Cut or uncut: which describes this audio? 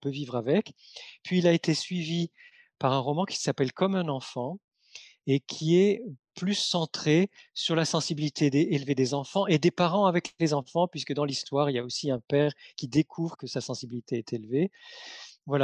cut